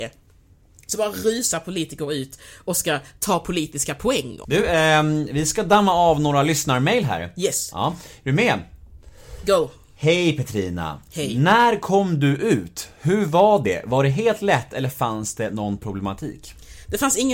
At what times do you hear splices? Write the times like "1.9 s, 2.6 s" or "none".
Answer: 4.4 s